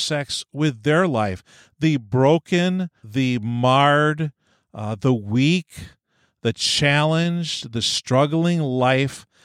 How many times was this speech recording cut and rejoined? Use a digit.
1